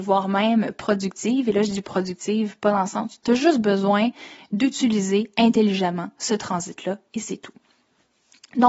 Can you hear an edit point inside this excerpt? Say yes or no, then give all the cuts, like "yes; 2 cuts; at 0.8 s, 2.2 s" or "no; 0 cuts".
yes; 1 cut; at 3.2 s